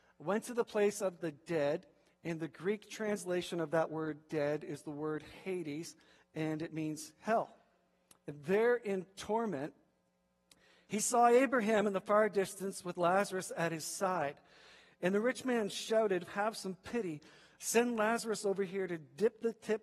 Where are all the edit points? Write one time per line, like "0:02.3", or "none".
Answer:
0:16.3